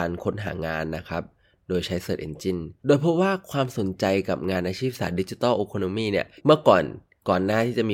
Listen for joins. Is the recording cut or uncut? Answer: cut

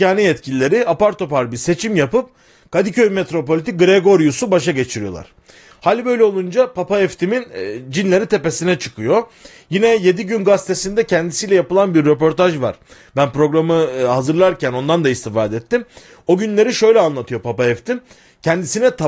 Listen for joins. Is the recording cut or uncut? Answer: uncut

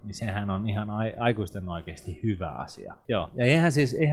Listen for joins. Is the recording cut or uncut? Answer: cut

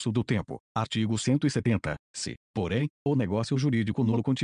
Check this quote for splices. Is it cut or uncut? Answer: uncut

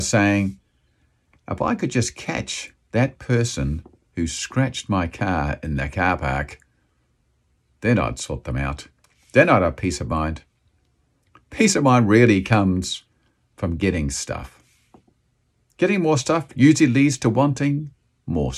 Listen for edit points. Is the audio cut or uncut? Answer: uncut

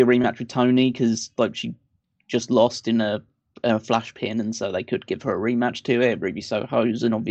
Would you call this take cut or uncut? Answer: uncut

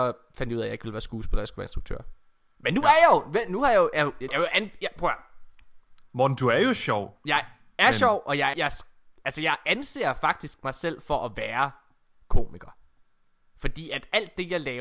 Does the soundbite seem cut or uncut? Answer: cut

